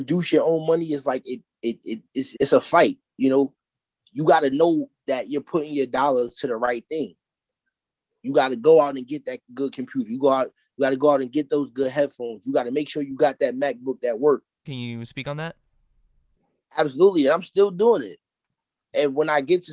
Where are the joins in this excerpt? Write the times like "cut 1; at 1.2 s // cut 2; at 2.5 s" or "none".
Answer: cut 1; at 2.3 s // cut 2; at 14.6 s